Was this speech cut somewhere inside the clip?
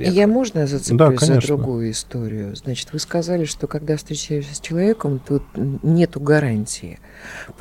no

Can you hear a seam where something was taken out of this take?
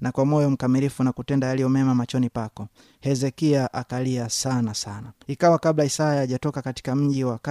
yes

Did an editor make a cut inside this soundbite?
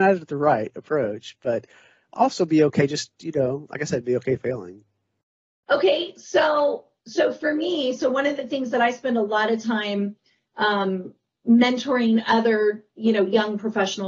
no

